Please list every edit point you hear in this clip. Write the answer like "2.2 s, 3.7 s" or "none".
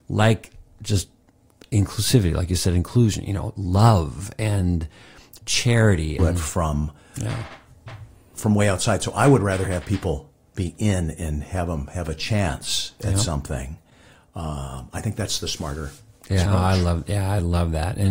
6.2 s, 16.5 s